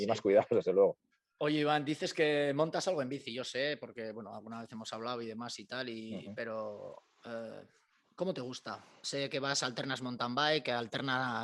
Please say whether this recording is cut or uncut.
uncut